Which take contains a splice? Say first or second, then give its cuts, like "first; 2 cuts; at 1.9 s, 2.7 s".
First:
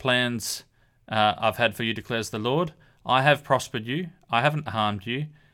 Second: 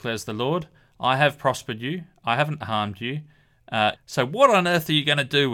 second; 1 cut; at 4.0 s